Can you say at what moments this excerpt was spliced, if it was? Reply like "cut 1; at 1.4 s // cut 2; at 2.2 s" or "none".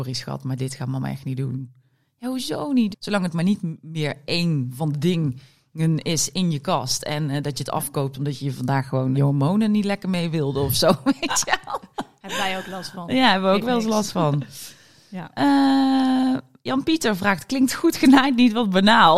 cut 1; at 2.9 s // cut 2; at 9.1 s